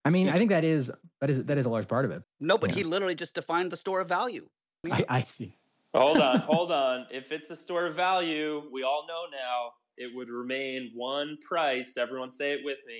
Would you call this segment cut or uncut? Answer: cut